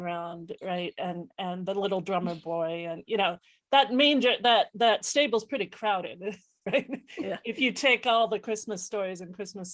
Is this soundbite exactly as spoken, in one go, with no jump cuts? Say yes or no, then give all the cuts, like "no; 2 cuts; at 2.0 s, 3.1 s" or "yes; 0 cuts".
yes; 0 cuts